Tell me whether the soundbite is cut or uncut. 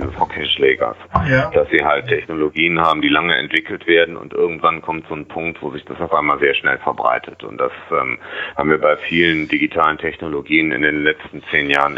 uncut